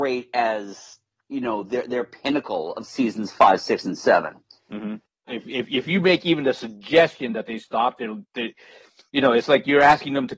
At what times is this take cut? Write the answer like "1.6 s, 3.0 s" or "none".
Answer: 5.3 s